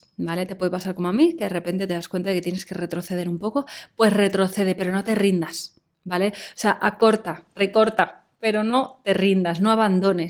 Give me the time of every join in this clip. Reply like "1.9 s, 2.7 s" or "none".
none